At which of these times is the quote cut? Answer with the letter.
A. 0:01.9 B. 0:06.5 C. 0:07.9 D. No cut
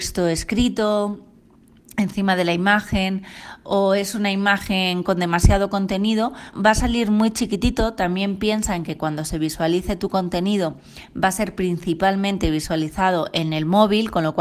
B